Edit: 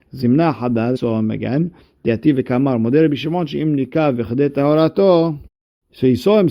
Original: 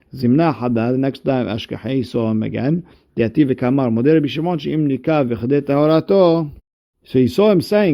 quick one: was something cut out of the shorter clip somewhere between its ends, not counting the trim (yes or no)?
yes